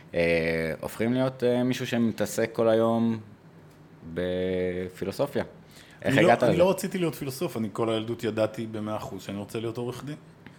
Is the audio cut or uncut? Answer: uncut